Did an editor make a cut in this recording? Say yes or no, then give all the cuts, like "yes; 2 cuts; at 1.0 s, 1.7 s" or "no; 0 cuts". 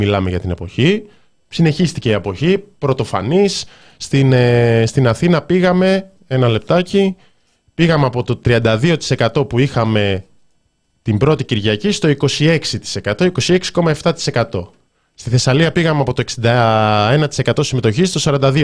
no; 0 cuts